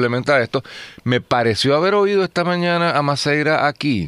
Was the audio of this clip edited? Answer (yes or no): no